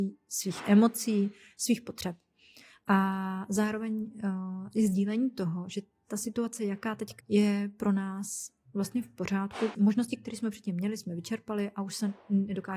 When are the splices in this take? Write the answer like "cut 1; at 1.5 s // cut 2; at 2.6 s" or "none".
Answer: cut 1; at 7.2 s // cut 2; at 9.7 s

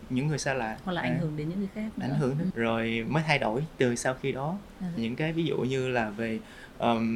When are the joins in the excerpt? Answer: cut 1; at 2.5 s // cut 2; at 5.0 s

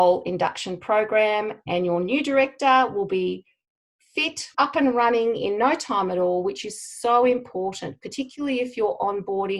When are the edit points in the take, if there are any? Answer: cut 1; at 4.5 s

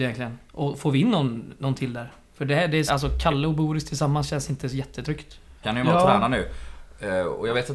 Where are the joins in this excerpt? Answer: cut 1; at 2.9 s // cut 2; at 5.6 s

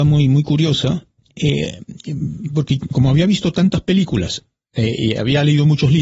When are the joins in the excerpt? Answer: none

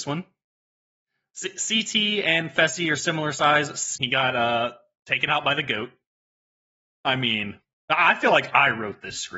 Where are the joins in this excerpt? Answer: cut 1; at 4.0 s

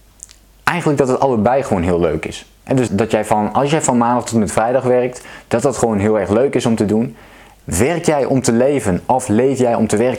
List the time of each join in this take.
cut 1; at 2.9 s // cut 2; at 7.6 s

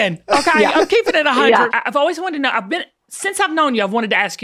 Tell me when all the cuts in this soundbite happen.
cut 1; at 1.7 s

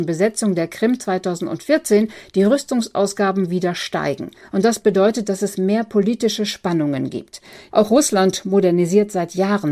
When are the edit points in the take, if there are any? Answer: cut 1; at 7.7 s

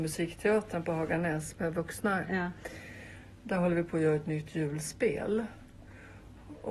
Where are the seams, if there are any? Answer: none

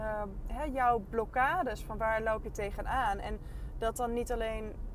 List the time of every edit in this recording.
none

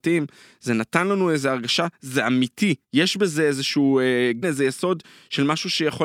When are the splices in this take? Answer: cut 1; at 2.8 s // cut 2; at 4.4 s

